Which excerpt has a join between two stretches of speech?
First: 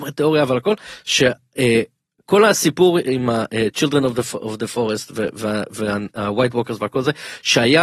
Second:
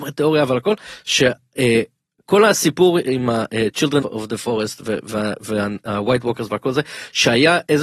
second; 1 cut; at 4.0 s

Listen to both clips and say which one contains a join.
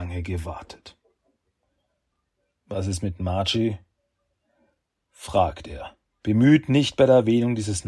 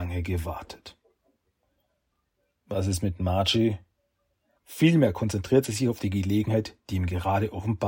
second; 1 cut; at 4.5 s

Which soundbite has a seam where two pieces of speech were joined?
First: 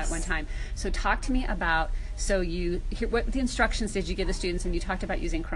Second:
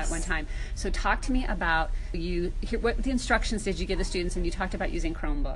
second; 1 cut; at 2.1 s

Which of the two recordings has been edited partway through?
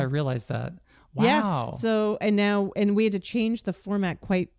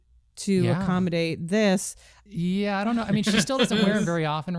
second; 1 cut; at 2.3 s

